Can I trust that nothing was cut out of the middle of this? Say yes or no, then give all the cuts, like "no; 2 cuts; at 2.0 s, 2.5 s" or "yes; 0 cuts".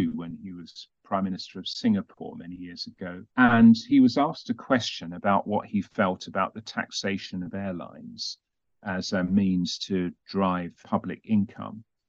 no; 2 cuts; at 3.3 s, 10.8 s